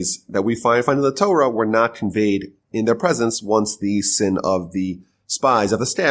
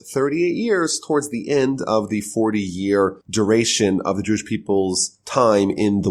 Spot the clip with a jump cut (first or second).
second